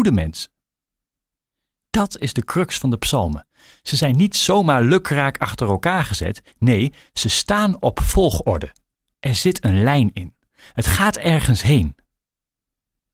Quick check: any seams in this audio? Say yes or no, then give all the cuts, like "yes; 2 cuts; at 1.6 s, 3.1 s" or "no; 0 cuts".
no; 0 cuts